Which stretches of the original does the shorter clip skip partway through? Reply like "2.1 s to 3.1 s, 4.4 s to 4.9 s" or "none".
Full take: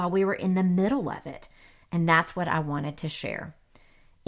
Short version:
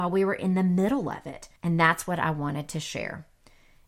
1.6 s to 1.8 s